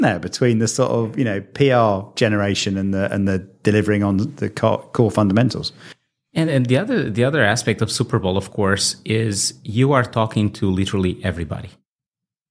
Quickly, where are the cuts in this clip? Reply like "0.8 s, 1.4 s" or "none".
none